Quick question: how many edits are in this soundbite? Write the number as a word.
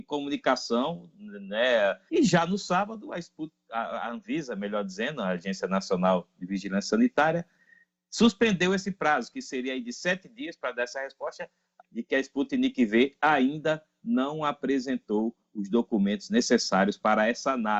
two